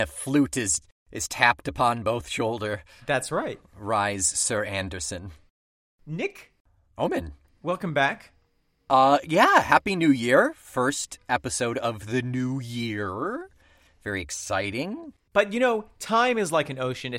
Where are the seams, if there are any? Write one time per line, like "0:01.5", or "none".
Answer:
0:15.3